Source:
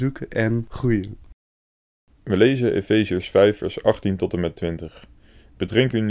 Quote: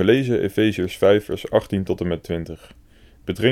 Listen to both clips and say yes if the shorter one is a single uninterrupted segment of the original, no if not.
yes